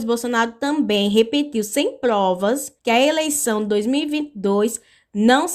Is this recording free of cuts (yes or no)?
no